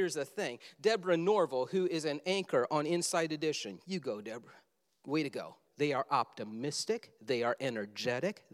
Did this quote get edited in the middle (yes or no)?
yes